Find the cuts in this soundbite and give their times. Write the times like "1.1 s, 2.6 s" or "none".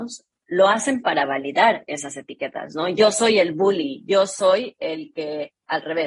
none